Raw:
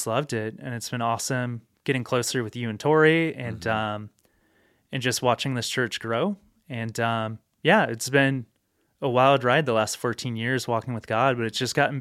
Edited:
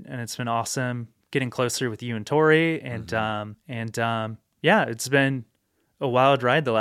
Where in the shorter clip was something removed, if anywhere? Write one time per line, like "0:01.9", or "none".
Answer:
0:03.5